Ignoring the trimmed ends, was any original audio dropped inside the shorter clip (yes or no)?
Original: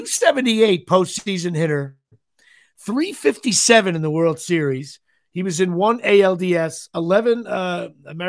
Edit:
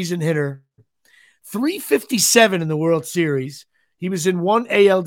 no